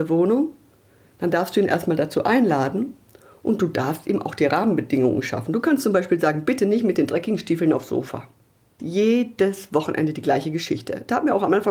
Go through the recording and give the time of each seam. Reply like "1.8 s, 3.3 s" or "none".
8.8 s